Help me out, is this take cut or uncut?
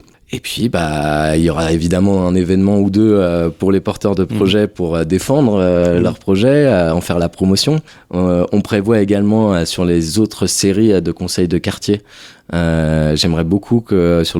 uncut